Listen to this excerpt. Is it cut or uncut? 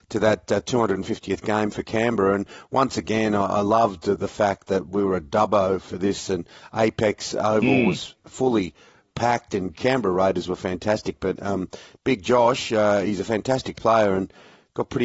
uncut